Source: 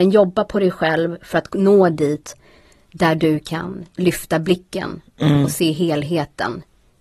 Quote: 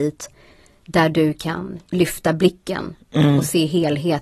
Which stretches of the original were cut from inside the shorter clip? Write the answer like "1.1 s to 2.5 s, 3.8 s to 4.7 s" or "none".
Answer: none